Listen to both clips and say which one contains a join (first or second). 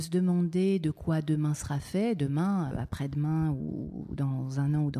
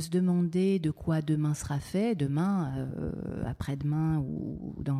first